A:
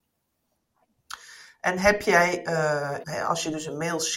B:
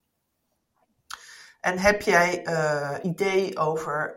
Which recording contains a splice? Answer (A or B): A